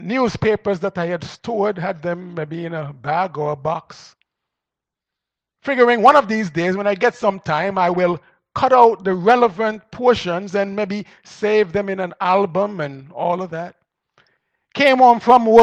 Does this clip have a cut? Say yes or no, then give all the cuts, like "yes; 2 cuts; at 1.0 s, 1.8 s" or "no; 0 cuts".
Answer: no; 0 cuts